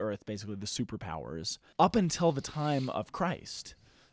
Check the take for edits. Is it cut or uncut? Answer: cut